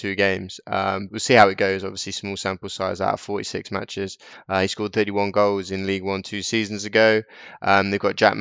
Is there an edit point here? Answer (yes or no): yes